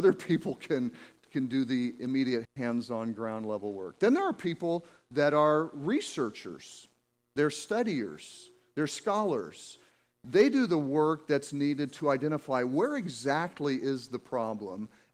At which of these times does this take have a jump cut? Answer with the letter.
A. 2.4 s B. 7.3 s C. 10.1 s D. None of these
A